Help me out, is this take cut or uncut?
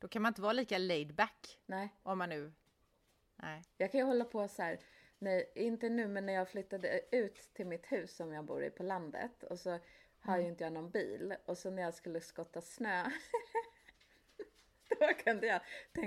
uncut